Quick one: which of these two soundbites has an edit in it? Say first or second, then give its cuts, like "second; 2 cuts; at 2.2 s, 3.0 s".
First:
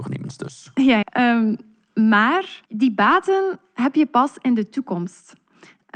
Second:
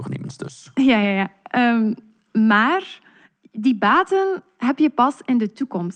first; 2 cuts; at 1.0 s, 2.6 s